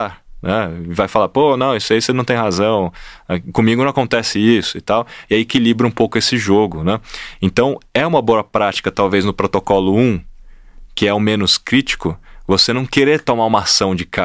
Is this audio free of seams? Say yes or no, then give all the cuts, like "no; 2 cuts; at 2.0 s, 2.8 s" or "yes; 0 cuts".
yes; 0 cuts